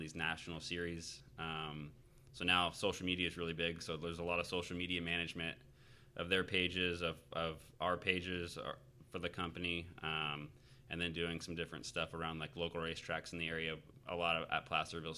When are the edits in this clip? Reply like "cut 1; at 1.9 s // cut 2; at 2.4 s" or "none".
none